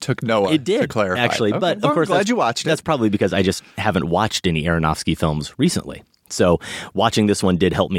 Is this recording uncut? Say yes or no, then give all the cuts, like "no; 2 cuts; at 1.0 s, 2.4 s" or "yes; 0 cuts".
yes; 0 cuts